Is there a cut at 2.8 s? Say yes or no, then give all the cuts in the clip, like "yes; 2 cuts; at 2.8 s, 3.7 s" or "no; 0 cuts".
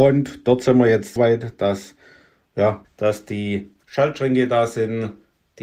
yes; 2 cuts; at 1.2 s, 2.8 s